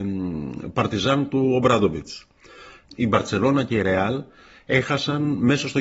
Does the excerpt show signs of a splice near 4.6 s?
no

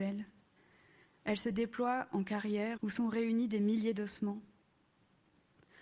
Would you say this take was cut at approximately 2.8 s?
yes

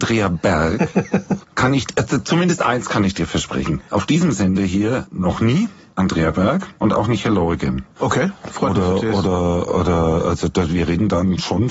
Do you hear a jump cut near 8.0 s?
yes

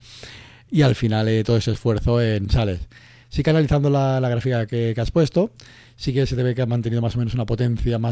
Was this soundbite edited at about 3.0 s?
no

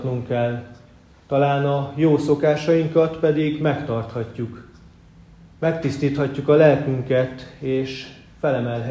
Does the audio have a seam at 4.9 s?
no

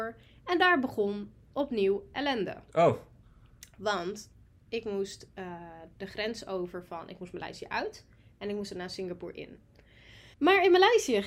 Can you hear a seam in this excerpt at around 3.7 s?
no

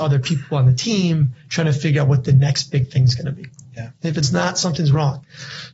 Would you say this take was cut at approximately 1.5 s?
no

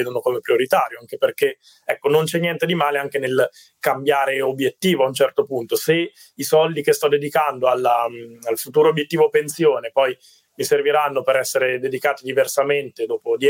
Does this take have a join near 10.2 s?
no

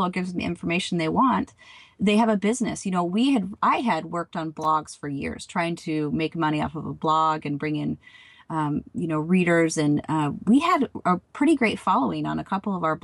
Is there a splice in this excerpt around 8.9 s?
no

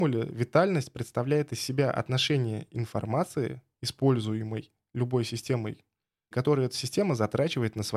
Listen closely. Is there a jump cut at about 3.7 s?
no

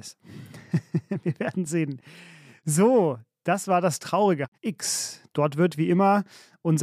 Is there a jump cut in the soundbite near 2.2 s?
no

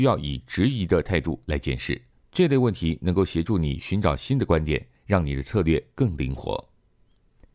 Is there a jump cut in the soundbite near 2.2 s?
yes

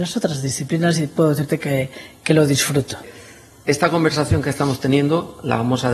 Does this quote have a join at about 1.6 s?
no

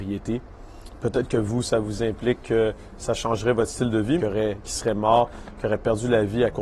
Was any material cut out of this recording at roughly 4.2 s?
yes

